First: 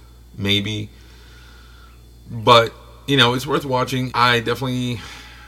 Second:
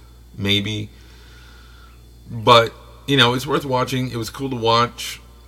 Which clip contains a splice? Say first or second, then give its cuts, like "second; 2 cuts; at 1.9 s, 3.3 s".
first; 1 cut; at 4.1 s